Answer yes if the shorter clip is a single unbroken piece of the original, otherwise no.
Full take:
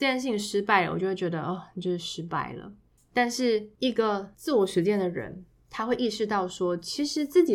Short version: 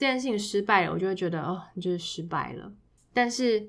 yes